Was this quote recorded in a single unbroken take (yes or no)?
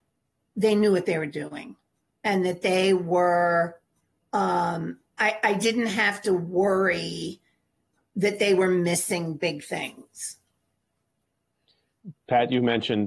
yes